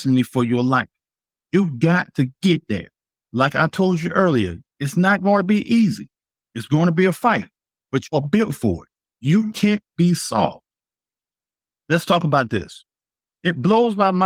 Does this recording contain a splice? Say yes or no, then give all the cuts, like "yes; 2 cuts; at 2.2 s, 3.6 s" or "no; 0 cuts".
no; 0 cuts